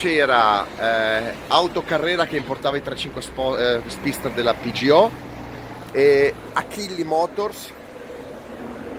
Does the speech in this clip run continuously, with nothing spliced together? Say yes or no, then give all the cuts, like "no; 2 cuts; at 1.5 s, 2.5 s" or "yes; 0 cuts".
yes; 0 cuts